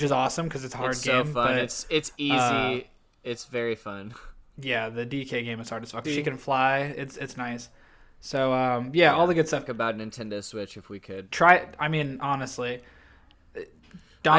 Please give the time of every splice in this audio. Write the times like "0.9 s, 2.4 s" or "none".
6.0 s, 9.7 s, 11.3 s